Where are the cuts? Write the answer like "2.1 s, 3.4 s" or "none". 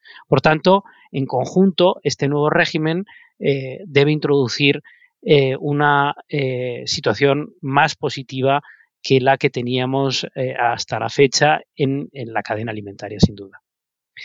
none